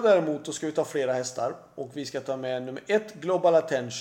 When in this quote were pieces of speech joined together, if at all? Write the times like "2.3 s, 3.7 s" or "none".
none

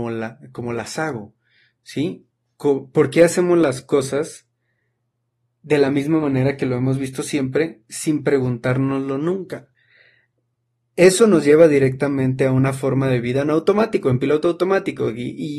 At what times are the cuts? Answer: none

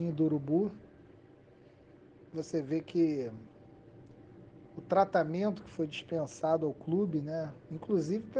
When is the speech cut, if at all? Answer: none

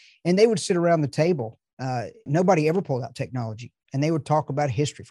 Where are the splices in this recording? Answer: 2.3 s, 3.8 s

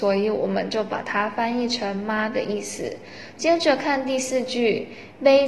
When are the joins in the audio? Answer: 3.3 s

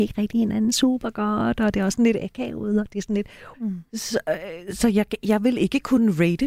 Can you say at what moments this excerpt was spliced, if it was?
3.5 s

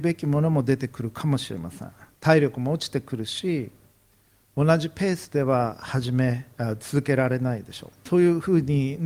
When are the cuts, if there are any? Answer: 8.0 s

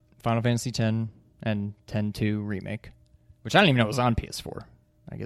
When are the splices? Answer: none

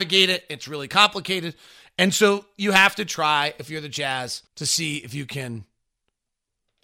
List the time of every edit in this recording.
4.5 s

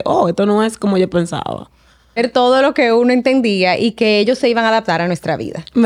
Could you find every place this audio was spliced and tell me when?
2.2 s

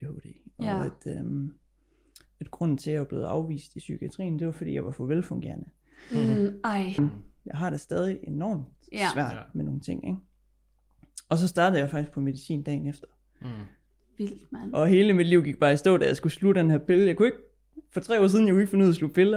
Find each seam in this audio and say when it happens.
7.0 s

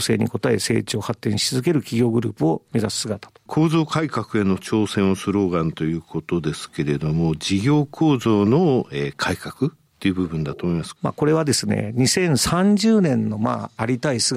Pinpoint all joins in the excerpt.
3.5 s, 11.0 s

